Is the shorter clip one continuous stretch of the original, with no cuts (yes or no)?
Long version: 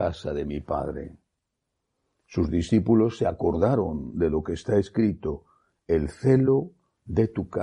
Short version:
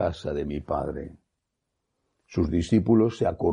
yes